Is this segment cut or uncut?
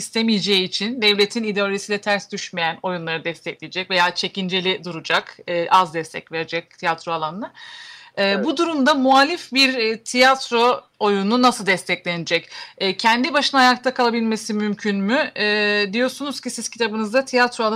cut